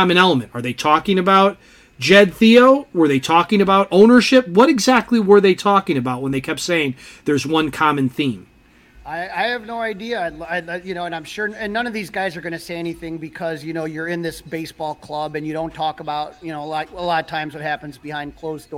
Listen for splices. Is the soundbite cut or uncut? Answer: uncut